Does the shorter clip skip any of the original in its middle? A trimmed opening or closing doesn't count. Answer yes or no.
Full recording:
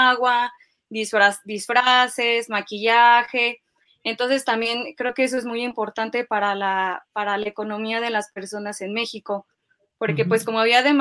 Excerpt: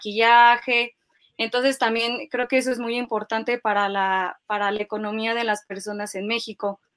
no